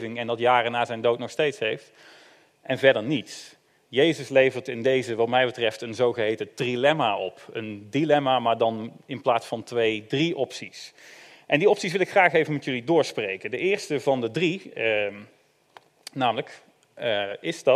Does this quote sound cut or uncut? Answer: uncut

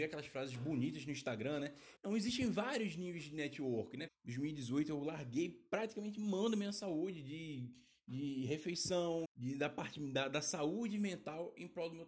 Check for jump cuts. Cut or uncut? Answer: cut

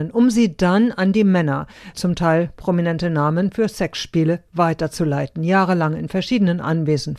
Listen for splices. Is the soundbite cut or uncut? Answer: cut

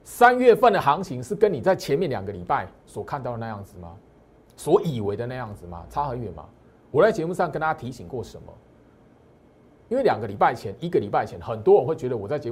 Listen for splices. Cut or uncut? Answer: uncut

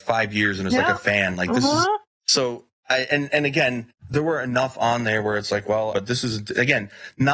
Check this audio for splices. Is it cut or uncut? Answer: cut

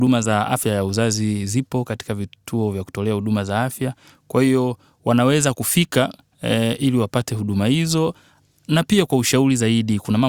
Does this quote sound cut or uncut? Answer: uncut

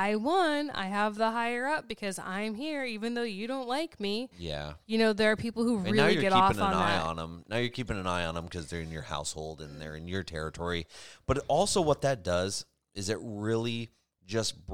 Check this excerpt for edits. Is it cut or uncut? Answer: uncut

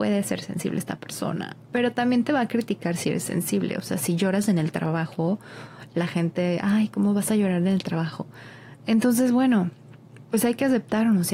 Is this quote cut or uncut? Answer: uncut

